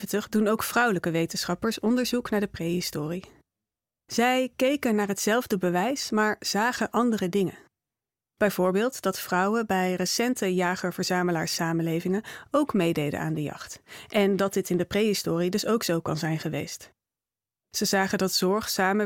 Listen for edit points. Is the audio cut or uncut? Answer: uncut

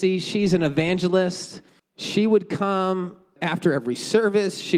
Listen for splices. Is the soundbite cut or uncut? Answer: cut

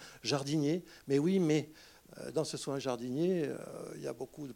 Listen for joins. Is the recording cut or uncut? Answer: uncut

